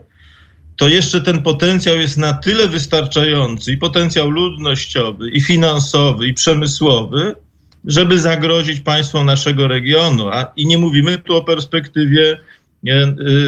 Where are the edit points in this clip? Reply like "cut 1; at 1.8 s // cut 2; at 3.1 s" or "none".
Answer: cut 1; at 5.3 s